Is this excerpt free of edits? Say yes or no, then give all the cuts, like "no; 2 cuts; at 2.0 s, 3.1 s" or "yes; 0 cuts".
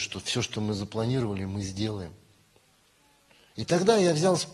yes; 0 cuts